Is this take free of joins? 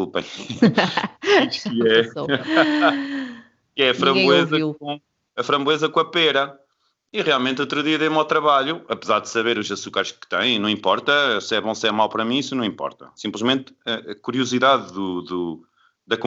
yes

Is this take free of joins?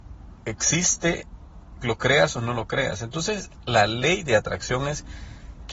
yes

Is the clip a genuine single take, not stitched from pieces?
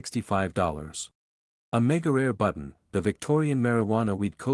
no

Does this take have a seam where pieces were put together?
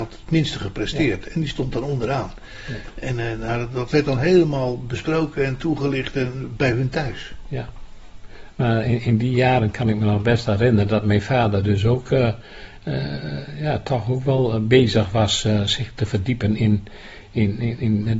no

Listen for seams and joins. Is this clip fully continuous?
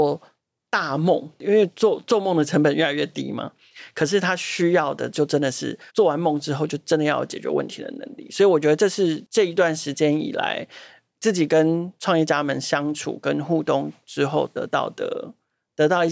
no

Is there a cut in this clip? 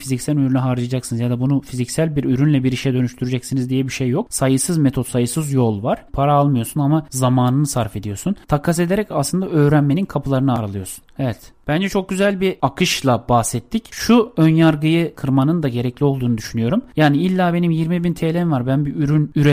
yes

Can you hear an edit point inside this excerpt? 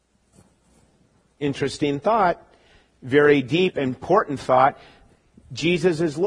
no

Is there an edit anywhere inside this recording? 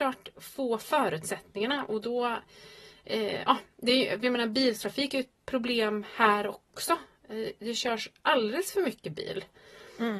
no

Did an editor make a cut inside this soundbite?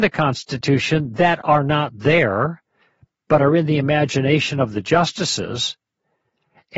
no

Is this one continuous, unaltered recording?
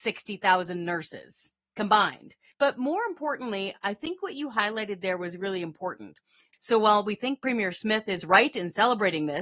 no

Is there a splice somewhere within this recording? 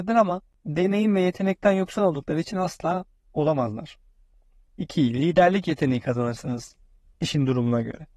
yes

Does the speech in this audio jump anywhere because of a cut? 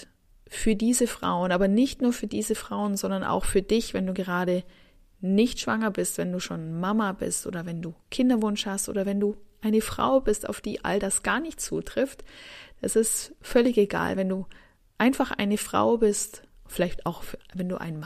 no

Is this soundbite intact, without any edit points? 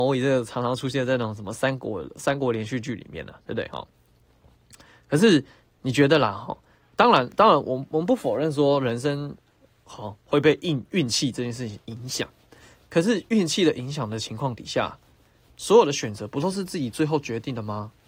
yes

